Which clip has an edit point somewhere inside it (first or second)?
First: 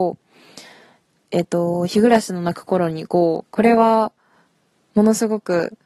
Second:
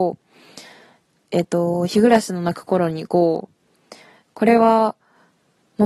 first